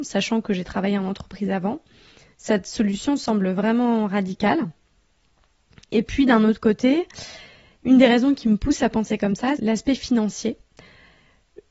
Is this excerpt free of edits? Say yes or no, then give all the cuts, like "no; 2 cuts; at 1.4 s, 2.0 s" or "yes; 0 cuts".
no; 1 cut; at 9.6 s